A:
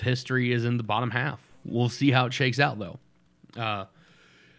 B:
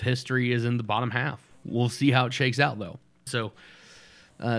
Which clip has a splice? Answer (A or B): B